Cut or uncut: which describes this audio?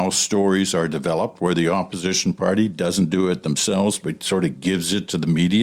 uncut